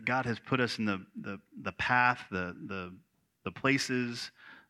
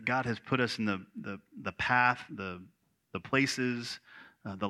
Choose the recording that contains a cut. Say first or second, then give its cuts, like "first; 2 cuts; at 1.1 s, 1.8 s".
second; 1 cut; at 2.3 s